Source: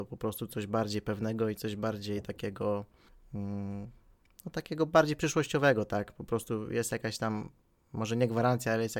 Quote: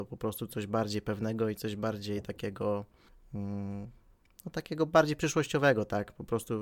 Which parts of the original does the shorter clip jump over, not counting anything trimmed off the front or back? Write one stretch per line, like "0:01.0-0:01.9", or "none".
none